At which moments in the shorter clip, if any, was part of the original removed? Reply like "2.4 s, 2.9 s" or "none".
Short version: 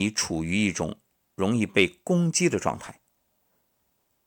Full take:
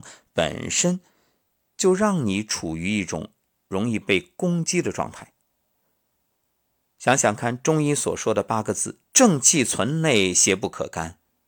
none